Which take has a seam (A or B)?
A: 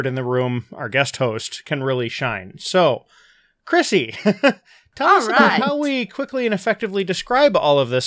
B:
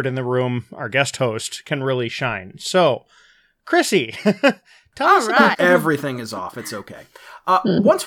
B